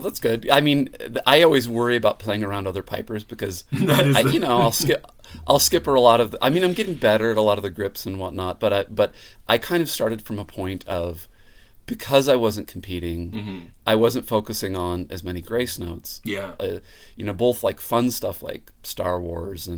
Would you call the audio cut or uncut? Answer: cut